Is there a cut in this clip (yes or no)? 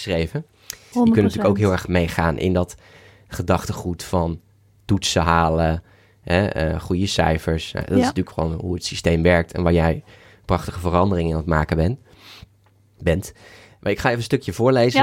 yes